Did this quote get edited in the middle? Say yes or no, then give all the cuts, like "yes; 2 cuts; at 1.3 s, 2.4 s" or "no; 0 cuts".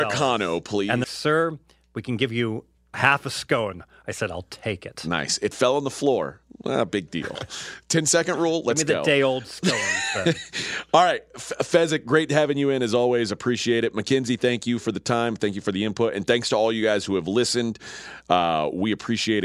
yes; 1 cut; at 1.0 s